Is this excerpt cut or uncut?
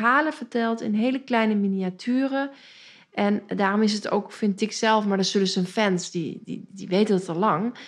uncut